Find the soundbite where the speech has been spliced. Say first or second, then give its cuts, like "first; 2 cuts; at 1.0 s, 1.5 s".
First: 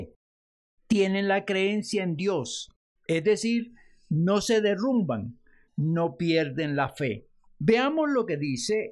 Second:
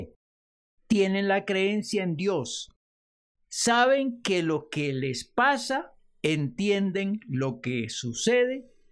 first; 3 cuts; at 3.0 s, 5.7 s, 7.5 s